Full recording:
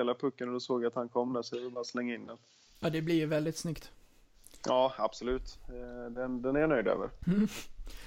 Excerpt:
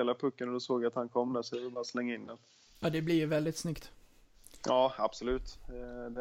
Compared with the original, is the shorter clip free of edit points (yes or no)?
yes